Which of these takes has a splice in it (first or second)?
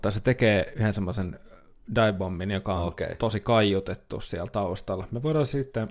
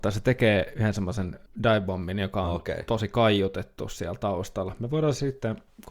second